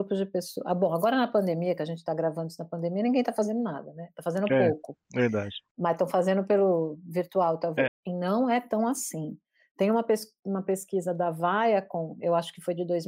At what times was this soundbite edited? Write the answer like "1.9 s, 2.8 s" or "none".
7.9 s